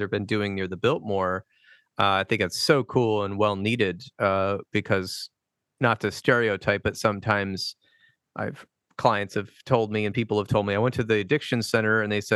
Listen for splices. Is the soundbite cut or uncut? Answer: uncut